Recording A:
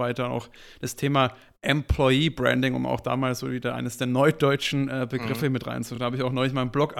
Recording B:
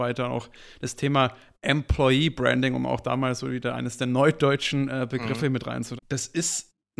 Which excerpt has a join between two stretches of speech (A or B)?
B